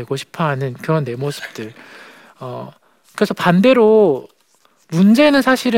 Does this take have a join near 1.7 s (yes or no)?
no